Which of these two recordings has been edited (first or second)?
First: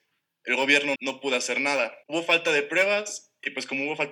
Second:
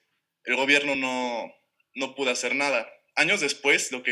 first